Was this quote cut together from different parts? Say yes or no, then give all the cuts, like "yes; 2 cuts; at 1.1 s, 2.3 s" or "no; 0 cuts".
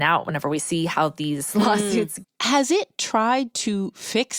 yes; 1 cut; at 2.2 s